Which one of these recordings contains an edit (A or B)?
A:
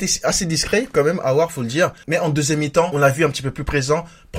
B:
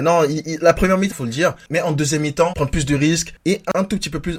B